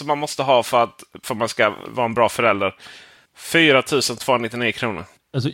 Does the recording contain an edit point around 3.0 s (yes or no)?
no